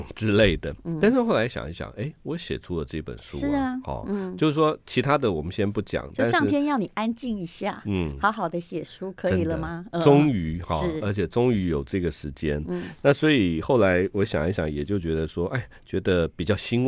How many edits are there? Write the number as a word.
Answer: zero